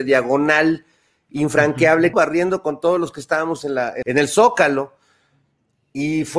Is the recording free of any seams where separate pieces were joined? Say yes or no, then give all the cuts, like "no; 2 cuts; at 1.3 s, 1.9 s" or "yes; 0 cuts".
no; 2 cuts; at 2.1 s, 4.0 s